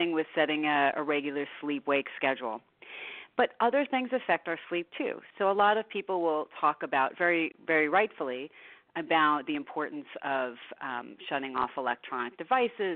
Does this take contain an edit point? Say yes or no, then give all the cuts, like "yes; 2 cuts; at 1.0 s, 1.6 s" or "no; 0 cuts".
yes; 1 cut; at 5.3 s